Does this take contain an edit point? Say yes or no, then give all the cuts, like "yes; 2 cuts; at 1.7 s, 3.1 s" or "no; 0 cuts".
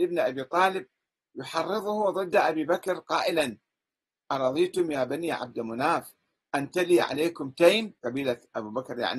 yes; 1 cut; at 8.0 s